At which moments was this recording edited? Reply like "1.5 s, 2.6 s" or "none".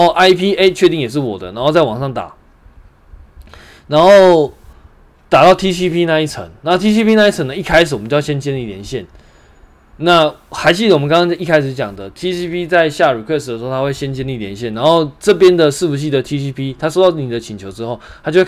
none